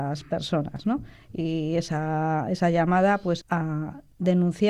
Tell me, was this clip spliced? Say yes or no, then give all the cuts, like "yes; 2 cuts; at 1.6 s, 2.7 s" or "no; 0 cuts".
yes; 1 cut; at 3.4 s